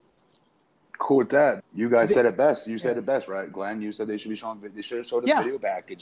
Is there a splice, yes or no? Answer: yes